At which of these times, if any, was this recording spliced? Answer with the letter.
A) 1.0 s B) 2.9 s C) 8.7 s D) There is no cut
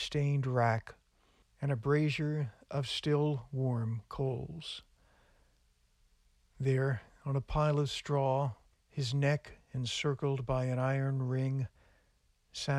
C